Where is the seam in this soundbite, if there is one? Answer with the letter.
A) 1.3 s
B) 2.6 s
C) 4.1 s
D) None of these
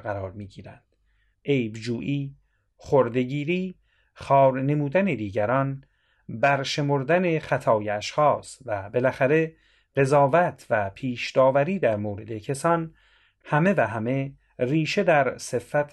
A